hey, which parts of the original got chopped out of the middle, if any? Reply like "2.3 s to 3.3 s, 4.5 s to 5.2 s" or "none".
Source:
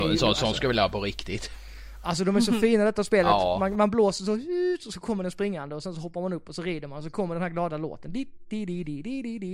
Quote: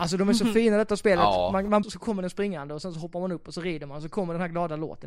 3.9 s to 4.8 s